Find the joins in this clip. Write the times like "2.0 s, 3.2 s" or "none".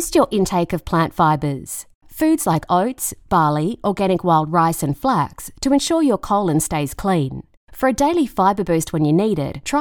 none